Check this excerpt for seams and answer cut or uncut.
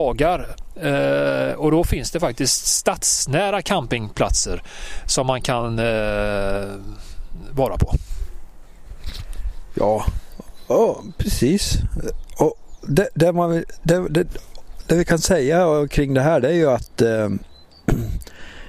uncut